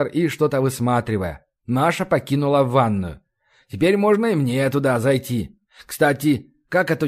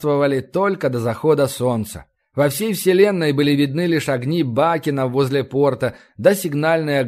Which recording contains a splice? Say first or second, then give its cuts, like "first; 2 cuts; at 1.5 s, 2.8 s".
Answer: first; 1 cut; at 1.6 s